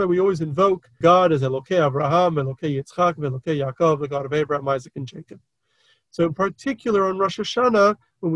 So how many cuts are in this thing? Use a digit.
1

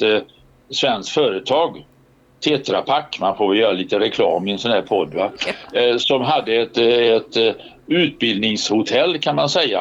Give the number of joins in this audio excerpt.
0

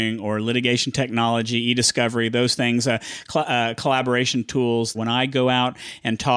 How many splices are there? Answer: 1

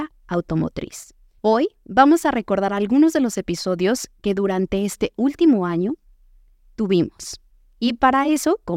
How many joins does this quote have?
1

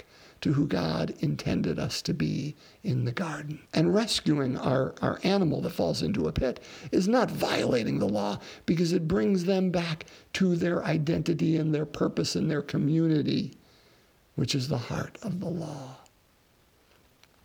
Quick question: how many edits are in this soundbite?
1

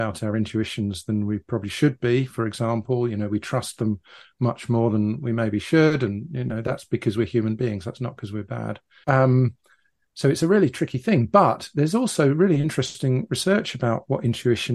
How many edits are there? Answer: 1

